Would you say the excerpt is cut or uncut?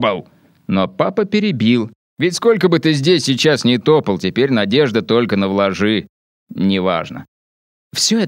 cut